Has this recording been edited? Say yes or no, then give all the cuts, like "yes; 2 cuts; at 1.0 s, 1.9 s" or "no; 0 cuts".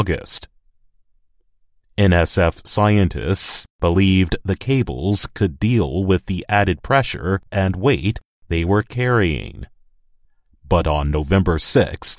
no; 0 cuts